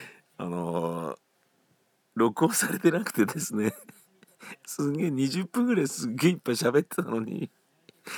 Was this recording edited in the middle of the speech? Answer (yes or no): no